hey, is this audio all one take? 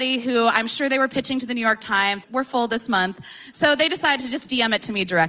no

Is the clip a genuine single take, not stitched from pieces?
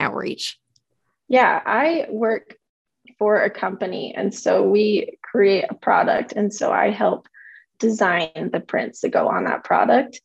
yes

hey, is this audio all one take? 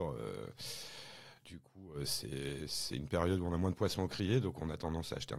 yes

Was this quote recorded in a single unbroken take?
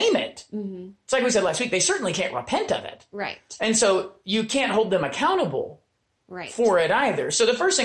yes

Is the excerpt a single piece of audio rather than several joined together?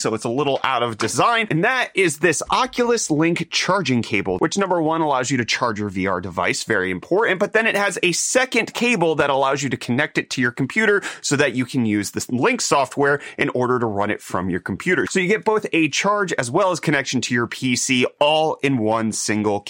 yes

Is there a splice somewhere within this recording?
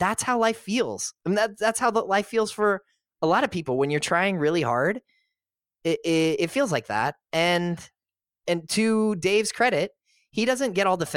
no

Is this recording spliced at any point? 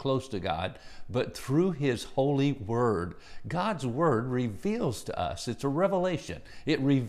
no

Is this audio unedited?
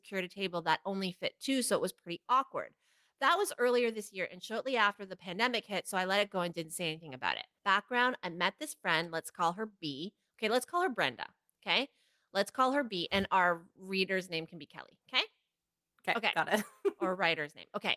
no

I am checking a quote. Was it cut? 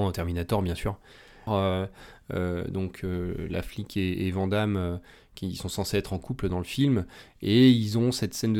yes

